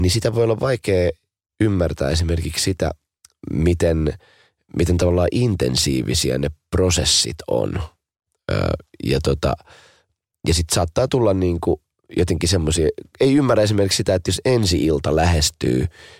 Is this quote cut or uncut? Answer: uncut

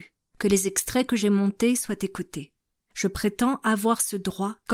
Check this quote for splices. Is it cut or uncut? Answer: uncut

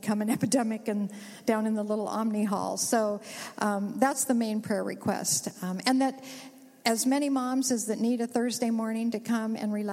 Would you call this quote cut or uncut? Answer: uncut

